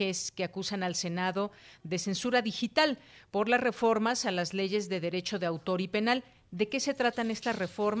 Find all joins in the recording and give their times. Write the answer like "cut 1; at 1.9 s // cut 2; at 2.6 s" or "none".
none